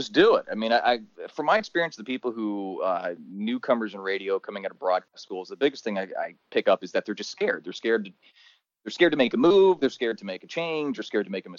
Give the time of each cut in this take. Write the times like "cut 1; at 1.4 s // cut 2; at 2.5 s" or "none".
cut 1; at 5.1 s